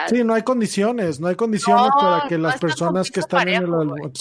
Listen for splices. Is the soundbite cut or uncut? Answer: uncut